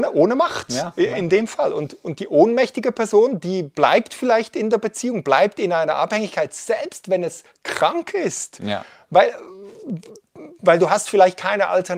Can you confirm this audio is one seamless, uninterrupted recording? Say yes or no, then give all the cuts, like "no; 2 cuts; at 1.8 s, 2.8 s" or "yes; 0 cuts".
yes; 0 cuts